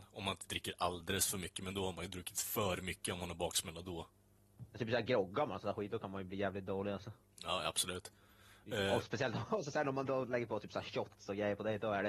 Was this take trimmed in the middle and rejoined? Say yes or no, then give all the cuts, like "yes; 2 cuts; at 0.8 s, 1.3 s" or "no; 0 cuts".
yes; 1 cut; at 4.4 s